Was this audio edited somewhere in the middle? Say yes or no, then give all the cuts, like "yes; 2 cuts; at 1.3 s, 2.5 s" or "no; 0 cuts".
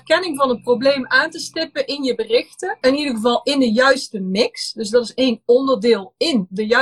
yes; 1 cut; at 2.8 s